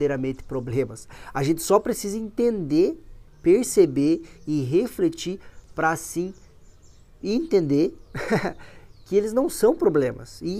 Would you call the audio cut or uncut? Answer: cut